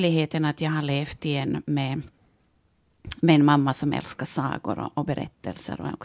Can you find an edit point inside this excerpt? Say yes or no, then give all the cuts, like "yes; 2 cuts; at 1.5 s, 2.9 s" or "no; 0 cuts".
no; 0 cuts